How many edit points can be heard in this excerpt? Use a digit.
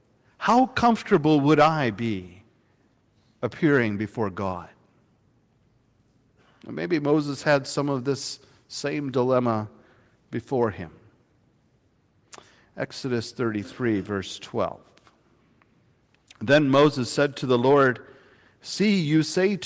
0